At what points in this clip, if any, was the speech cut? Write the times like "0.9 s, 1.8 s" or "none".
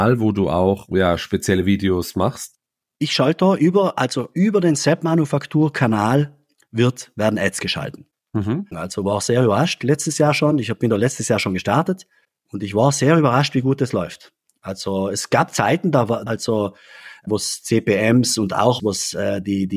8.7 s, 16.3 s, 18.8 s